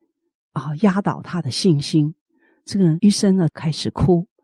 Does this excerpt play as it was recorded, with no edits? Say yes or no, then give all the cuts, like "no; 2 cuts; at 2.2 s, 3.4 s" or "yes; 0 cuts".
no; 1 cut; at 3.5 s